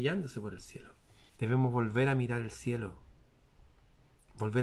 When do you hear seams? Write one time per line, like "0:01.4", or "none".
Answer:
0:01.3